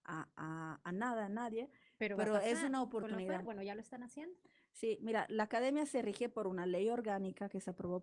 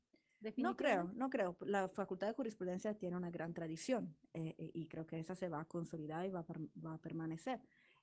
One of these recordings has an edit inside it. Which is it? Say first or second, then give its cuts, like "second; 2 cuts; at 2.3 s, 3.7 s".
first; 1 cut; at 3.5 s